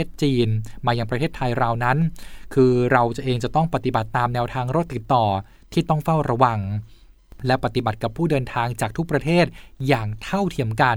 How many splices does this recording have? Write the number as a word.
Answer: one